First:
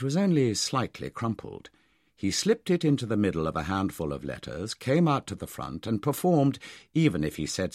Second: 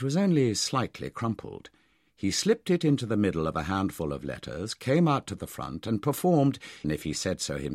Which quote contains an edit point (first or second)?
second